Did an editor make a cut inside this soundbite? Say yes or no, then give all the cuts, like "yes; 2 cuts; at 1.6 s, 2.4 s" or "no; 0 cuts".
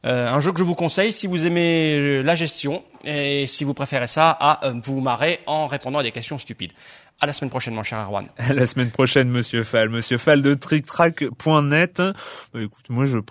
no; 0 cuts